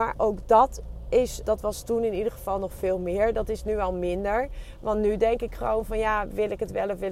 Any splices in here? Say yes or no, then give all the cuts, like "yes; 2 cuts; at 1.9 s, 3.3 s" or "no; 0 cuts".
yes; 1 cut; at 1.4 s